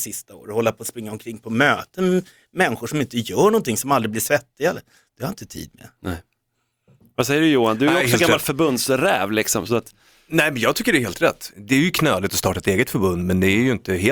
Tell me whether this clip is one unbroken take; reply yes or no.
no